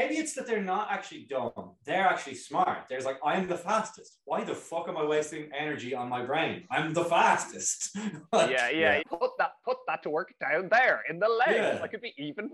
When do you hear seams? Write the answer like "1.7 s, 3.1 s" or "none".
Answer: 9.0 s